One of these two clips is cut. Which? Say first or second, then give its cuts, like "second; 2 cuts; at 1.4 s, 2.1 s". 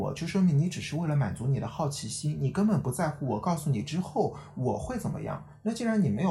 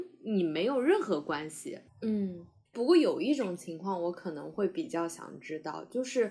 second; 1 cut; at 1.9 s